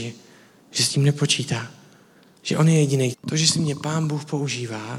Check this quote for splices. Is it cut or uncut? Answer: cut